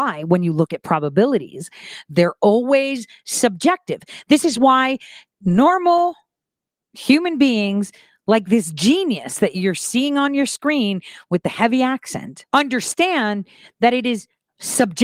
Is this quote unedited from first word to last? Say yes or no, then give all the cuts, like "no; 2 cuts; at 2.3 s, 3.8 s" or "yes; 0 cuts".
no; 1 cut; at 12.5 s